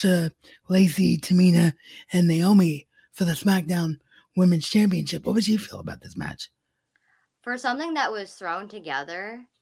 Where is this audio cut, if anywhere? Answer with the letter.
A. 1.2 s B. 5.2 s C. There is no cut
C